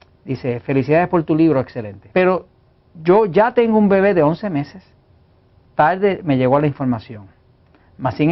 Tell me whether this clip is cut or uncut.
cut